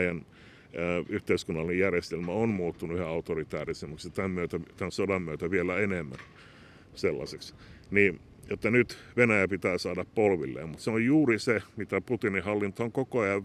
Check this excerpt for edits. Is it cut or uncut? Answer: uncut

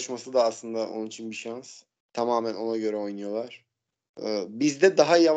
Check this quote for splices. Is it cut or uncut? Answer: cut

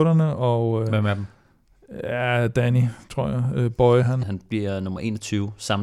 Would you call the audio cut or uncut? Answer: cut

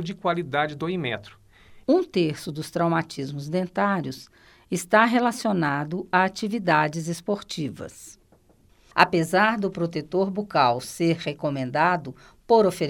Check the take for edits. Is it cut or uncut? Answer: cut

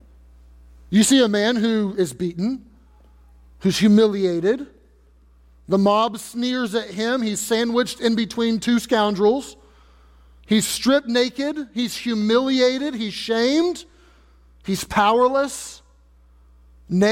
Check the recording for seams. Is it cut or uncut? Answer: uncut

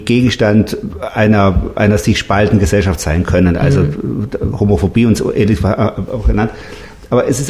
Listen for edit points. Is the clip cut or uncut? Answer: uncut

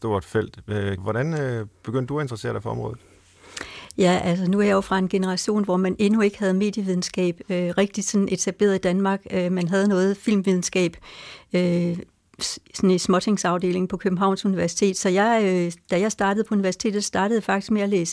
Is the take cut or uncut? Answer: cut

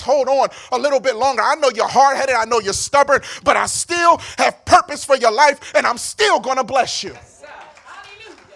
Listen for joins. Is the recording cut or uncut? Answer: uncut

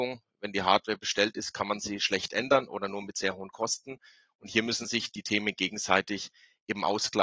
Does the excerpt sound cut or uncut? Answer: uncut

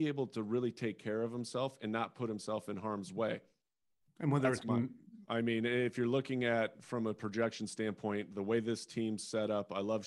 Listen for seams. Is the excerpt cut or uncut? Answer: cut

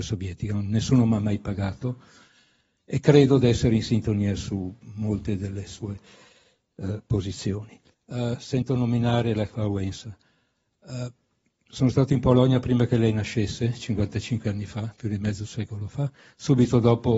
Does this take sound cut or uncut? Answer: cut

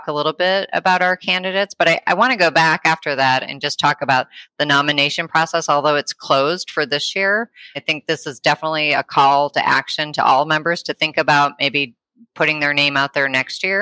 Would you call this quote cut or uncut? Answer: uncut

